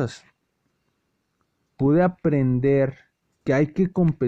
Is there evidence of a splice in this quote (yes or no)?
no